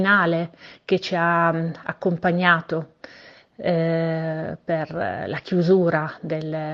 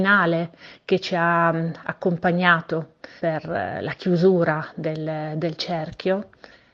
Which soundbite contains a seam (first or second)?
second